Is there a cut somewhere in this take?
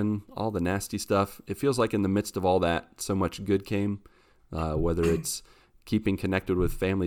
no; 0 cuts

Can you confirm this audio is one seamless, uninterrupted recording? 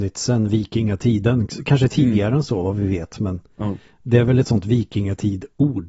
yes; 0 cuts

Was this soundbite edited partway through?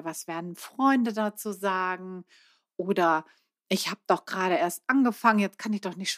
no; 0 cuts

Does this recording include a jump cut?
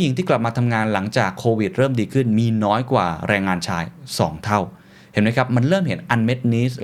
no; 0 cuts

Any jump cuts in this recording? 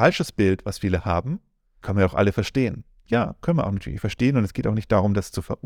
yes; 1 cut; at 1.8 s

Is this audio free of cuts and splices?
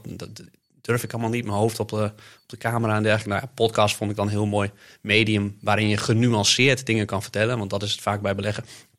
yes; 0 cuts

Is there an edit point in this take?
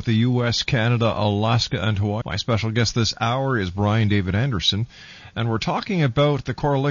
yes; 1 cut; at 2.2 s

